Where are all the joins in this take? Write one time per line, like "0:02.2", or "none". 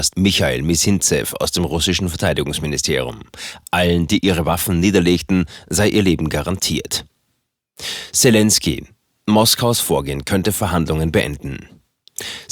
none